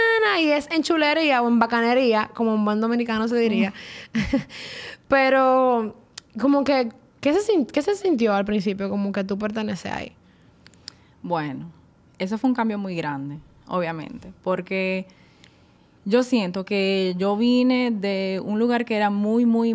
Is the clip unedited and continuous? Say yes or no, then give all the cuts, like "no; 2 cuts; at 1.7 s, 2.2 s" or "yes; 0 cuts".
yes; 0 cuts